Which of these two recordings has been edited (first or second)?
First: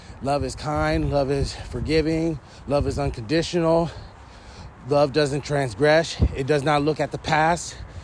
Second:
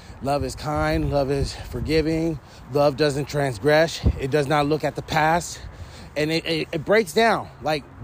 second